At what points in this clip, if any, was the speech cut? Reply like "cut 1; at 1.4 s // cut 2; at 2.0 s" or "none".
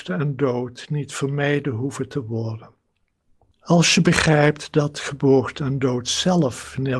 cut 1; at 3.5 s